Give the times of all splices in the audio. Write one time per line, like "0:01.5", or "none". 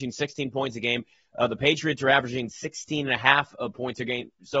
none